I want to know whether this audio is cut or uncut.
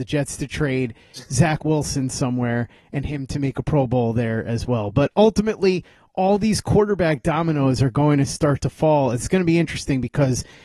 uncut